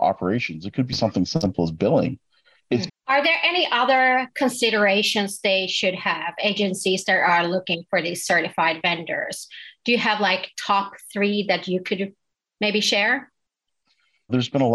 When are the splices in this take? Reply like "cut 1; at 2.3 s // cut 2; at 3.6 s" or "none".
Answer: cut 1; at 2.9 s